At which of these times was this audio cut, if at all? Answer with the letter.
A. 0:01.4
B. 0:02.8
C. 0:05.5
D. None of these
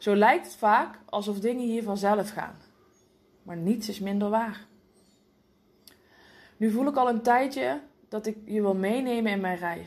D